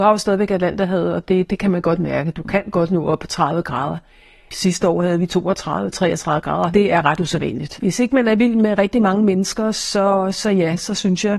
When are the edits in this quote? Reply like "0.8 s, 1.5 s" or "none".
6.7 s, 7.8 s